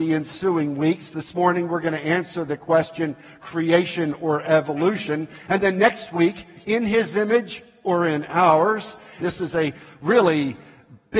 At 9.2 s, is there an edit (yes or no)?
yes